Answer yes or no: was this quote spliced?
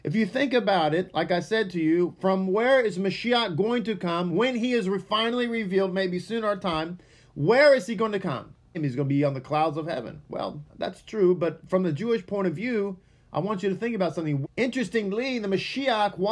yes